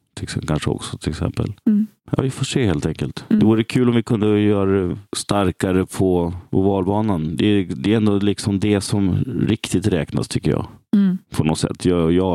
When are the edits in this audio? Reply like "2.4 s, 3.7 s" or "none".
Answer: none